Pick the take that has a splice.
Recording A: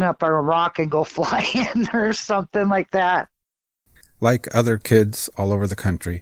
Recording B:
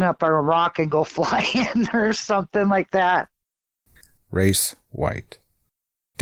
B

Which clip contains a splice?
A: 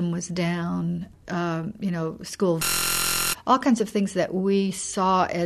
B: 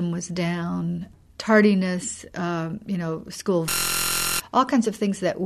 A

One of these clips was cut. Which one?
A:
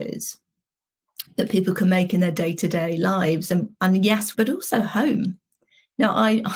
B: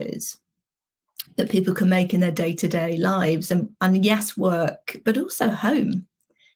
A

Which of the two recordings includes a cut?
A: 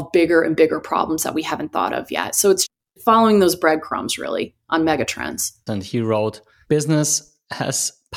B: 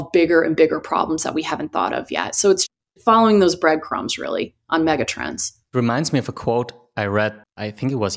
A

